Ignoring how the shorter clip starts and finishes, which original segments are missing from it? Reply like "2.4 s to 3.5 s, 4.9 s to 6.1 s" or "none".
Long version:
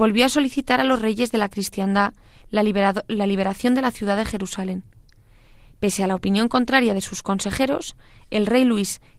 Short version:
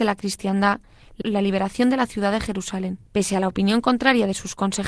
2.5 s to 3.1 s, 4.9 s to 5.7 s